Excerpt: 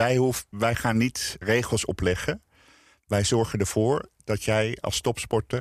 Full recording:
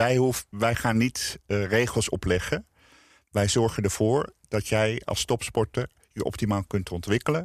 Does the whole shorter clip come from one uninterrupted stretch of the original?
no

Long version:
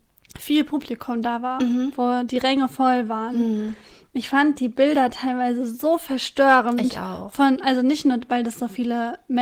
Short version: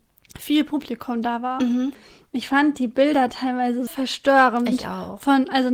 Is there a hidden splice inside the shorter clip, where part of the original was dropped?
yes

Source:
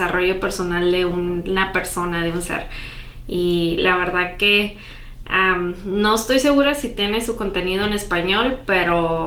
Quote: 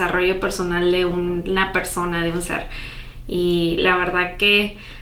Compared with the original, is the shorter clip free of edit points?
yes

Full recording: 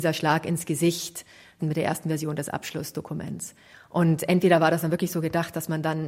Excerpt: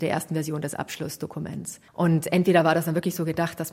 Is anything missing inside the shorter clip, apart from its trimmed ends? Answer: yes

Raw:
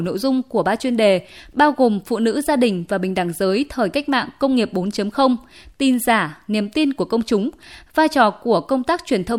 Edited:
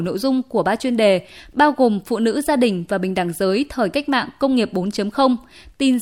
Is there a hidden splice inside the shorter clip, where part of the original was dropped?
no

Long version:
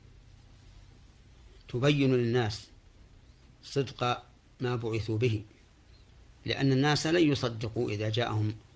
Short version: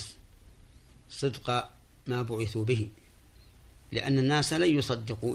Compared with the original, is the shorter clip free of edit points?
yes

